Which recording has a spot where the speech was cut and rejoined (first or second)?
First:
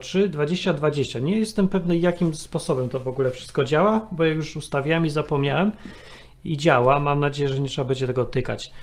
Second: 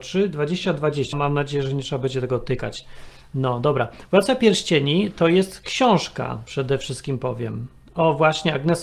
second